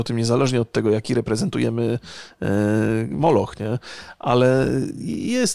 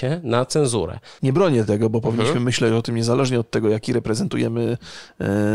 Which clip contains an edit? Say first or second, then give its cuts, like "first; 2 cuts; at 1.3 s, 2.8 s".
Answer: second; 1 cut; at 1.2 s